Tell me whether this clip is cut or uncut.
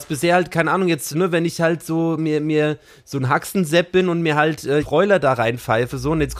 cut